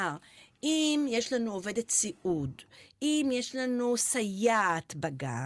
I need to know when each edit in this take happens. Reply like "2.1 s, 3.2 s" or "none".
none